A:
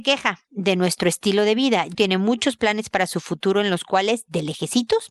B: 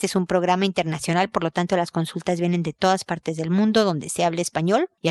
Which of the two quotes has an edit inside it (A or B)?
A